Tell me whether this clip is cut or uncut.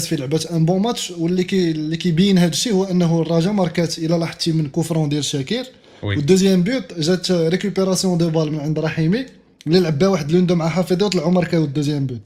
uncut